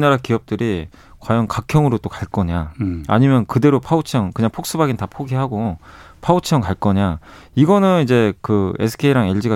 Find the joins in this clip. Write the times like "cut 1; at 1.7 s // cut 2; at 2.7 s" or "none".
none

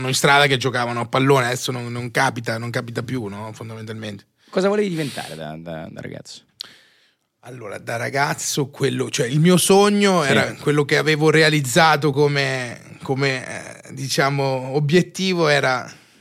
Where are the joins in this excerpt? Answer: none

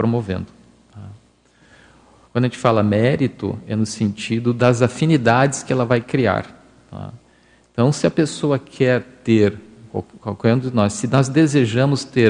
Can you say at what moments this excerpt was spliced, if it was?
cut 1; at 2.2 s

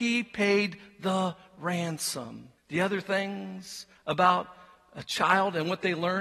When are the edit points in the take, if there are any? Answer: cut 1; at 2.6 s

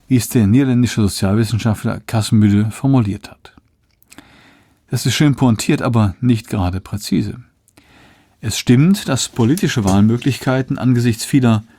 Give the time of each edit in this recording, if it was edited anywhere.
none

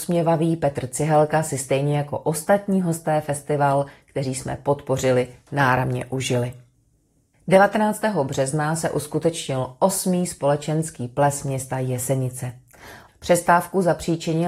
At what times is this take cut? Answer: cut 1; at 13.1 s

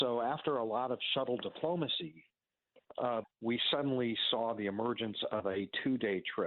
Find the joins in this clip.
cut 1; at 3.2 s

